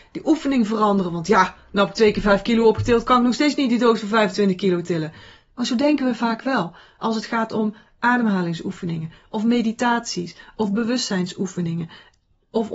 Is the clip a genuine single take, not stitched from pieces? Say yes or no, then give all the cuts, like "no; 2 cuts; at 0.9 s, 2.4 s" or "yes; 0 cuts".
yes; 0 cuts